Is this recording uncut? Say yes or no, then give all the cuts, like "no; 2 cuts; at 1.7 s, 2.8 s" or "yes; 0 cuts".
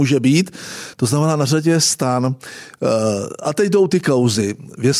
yes; 0 cuts